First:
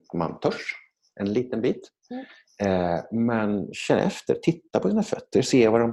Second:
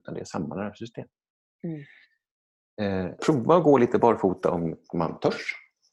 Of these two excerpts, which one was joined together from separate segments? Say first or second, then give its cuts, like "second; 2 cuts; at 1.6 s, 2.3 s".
second; 1 cut; at 3.2 s